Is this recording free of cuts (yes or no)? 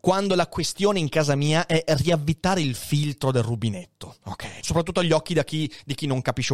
no